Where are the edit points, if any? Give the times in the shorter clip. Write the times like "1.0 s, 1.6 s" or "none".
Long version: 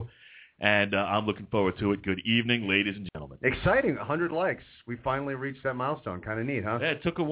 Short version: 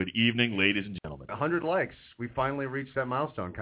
1.3 s